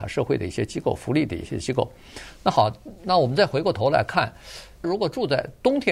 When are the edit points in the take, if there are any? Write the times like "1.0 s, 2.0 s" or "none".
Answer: 4.8 s

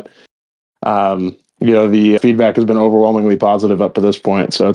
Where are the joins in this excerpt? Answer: 2.2 s

